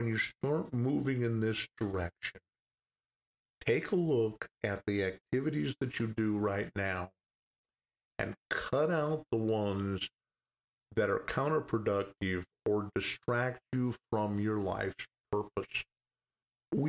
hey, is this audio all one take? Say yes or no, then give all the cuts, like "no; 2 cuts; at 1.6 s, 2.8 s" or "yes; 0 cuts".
yes; 0 cuts